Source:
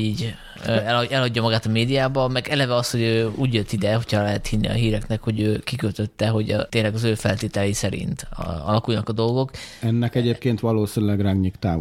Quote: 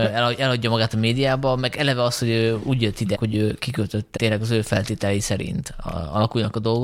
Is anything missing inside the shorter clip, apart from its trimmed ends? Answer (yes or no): yes